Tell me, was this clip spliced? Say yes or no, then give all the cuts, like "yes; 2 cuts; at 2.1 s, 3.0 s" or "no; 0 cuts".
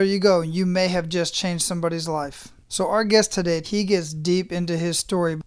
yes; 1 cut; at 3.6 s